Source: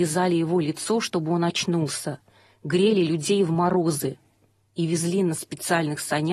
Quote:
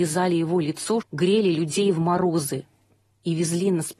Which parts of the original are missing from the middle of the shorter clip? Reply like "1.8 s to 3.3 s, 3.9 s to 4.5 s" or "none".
1.0 s to 2.5 s

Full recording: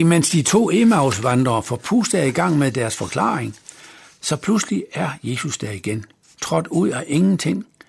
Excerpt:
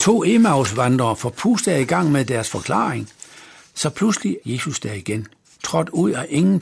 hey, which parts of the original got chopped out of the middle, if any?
4.9 s to 5.2 s

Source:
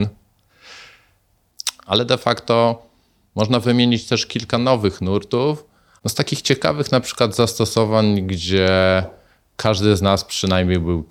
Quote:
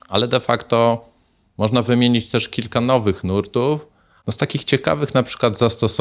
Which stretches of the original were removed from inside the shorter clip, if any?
none

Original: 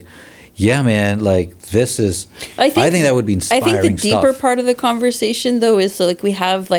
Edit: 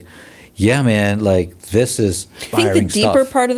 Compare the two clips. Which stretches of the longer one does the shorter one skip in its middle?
2.5 s to 3.6 s

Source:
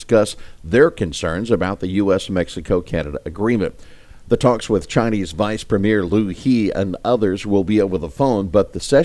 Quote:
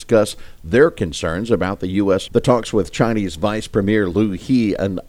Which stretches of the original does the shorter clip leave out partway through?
2.3 s to 4.2 s

